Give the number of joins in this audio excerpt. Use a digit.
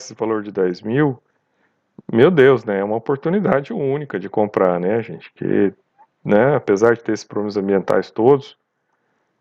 0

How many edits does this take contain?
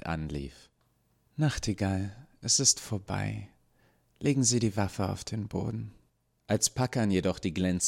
1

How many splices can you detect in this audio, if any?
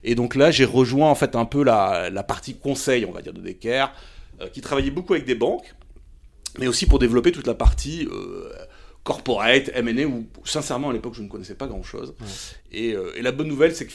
0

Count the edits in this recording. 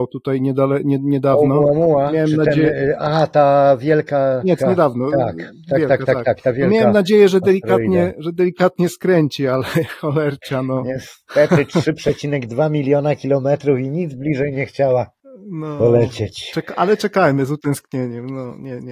1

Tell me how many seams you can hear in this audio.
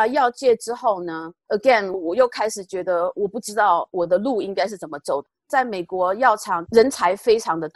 1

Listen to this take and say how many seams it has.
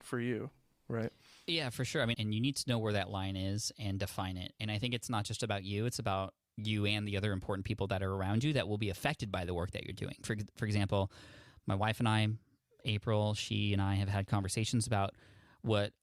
1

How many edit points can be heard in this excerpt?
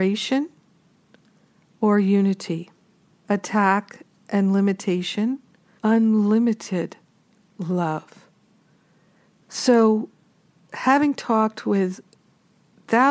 3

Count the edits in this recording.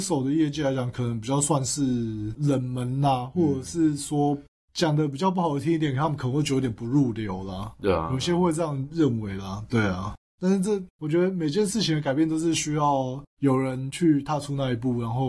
0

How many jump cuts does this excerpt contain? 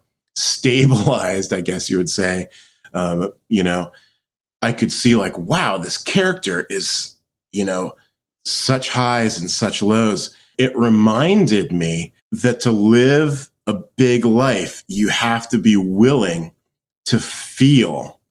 2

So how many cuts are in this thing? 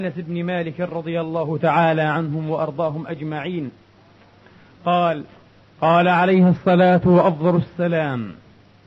0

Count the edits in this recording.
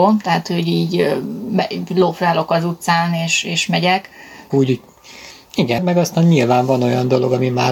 2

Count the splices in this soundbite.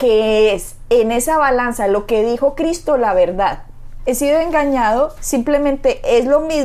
2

